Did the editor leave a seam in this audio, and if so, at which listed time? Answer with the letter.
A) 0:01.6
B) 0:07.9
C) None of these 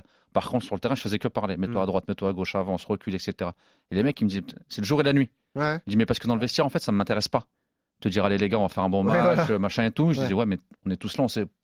C